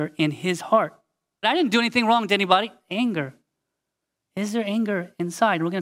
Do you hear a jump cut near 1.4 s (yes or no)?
yes